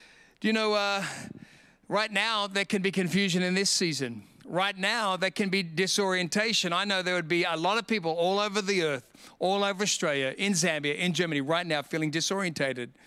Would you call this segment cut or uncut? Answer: uncut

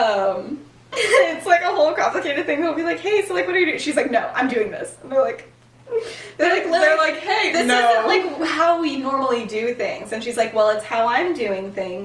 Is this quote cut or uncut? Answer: uncut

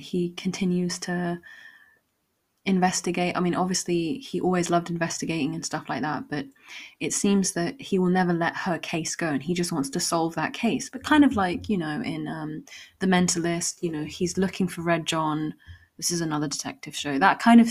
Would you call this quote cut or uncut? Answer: uncut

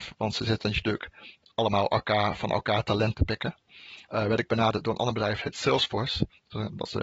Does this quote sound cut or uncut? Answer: uncut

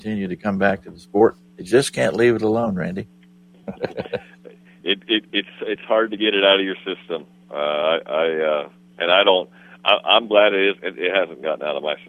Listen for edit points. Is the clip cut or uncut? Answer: uncut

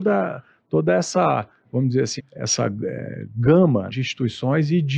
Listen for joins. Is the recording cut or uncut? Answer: cut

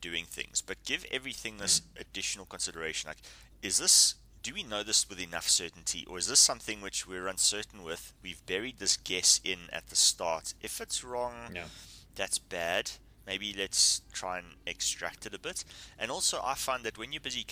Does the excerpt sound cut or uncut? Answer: uncut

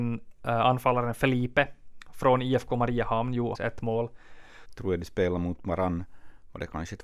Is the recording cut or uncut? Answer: cut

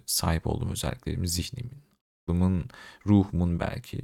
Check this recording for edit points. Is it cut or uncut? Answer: uncut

